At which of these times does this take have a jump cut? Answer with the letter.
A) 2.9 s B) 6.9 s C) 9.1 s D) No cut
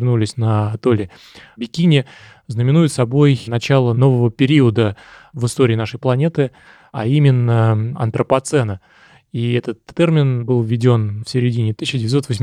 D